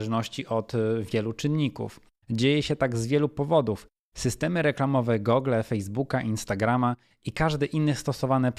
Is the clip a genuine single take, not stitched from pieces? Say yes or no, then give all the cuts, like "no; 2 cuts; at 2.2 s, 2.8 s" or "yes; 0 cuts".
no; 2 cuts; at 2.2 s, 4.0 s